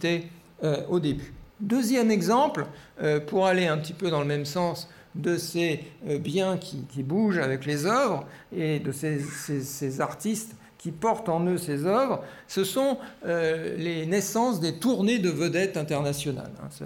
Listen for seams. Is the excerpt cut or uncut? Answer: cut